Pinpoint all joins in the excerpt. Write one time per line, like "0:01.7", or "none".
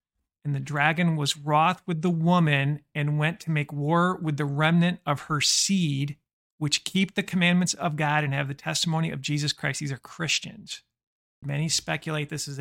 0:11.4